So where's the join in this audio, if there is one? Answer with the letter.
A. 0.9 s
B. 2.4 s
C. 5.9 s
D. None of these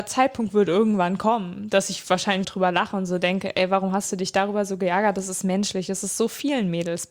B